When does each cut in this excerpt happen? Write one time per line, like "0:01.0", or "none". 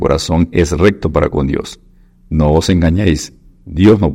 none